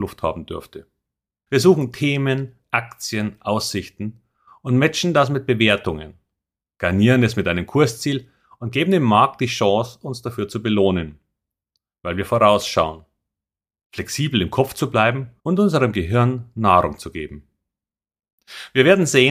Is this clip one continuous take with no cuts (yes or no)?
no